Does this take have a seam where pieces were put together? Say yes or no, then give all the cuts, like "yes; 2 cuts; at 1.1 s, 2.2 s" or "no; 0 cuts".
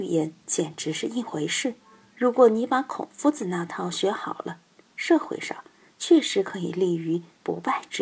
yes; 2 cuts; at 2.1 s, 4.9 s